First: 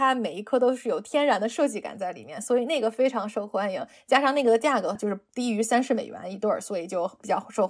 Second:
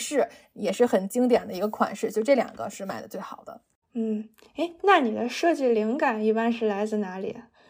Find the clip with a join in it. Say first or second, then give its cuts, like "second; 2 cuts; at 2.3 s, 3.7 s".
first; 1 cut; at 5.0 s